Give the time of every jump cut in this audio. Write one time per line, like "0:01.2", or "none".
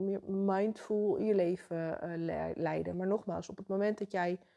none

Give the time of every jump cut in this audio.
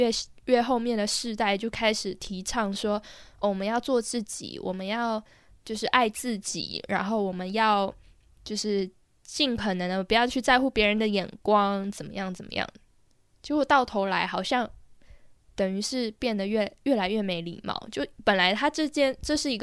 none

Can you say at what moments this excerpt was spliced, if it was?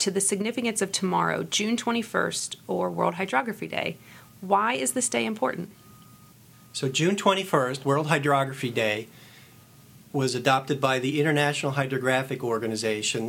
none

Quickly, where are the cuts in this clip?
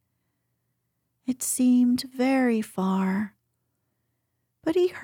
none

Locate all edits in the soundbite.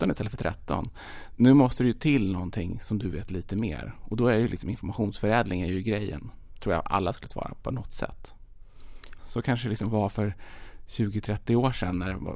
0:09.2

